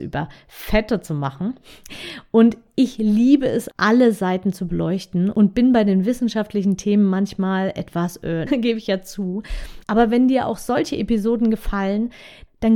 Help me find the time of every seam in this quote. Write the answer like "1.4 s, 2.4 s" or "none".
3.7 s, 8.5 s